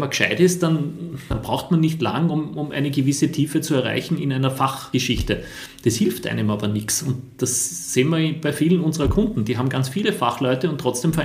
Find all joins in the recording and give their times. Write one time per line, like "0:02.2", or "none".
none

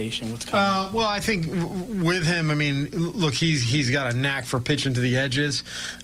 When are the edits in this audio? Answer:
none

